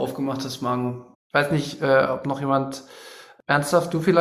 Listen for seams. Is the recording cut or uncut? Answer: cut